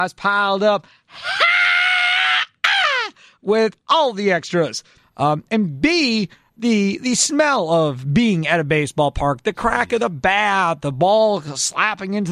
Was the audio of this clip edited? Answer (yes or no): yes